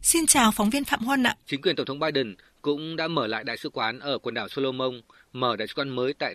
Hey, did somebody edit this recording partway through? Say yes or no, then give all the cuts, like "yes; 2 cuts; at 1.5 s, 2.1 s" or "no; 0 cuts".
yes; 1 cut; at 1.4 s